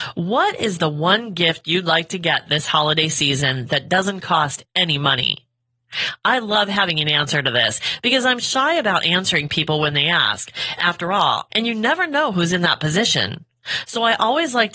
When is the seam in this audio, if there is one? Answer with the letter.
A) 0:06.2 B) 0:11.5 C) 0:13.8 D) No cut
B